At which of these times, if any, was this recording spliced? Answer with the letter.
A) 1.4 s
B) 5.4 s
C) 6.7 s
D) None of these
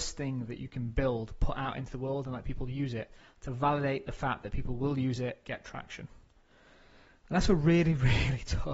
B